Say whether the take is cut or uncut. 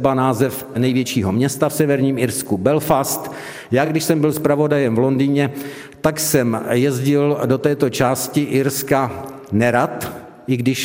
uncut